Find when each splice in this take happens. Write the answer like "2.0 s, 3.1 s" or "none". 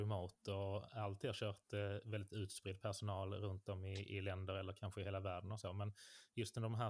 none